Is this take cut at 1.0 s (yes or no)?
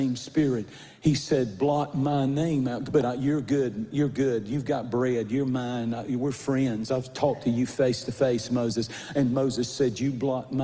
no